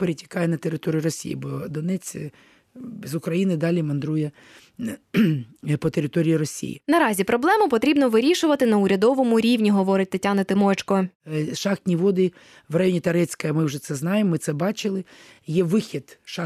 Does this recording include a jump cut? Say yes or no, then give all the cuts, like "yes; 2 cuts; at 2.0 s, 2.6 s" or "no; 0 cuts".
no; 0 cuts